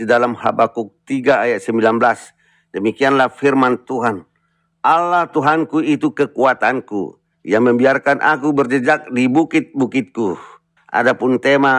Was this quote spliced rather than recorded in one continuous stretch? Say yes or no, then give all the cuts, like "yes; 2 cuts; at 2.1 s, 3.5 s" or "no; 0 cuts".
yes; 2 cuts; at 7.3 s, 10.8 s